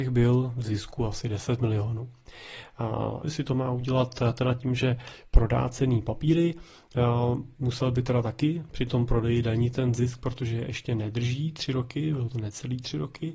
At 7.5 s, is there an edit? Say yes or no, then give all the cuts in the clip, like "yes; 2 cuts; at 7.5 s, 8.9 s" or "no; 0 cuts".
no; 1 cut; at 3.2 s